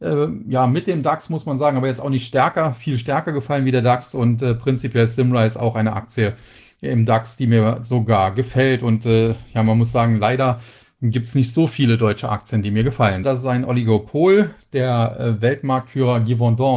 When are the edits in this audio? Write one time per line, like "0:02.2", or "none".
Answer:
0:13.2